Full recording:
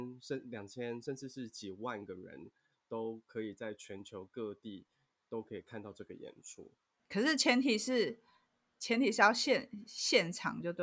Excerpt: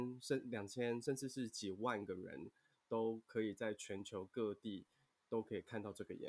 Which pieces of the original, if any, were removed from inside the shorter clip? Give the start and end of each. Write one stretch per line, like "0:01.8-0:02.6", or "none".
none